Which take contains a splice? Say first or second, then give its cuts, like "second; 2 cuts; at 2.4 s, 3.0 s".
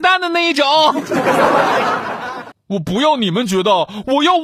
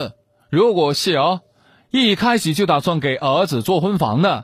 first; 1 cut; at 2.5 s